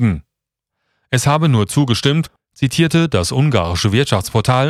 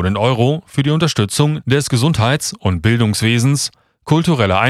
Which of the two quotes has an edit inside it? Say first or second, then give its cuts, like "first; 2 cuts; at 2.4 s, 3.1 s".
first; 1 cut; at 2.4 s